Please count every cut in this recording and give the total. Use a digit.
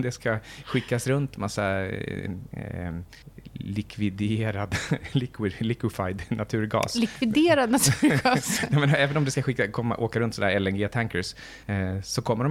0